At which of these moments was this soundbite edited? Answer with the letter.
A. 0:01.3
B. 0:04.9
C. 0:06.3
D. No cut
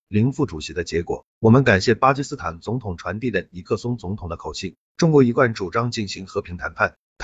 D